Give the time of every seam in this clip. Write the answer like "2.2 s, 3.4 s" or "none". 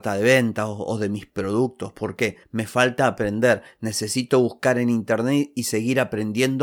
none